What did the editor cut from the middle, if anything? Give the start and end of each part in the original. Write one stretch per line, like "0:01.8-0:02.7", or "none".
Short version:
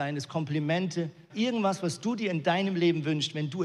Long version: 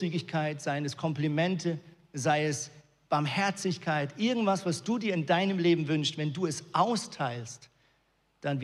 0:02.0-0:04.1